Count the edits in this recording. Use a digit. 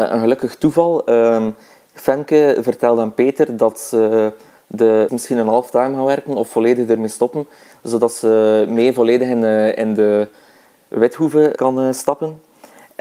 2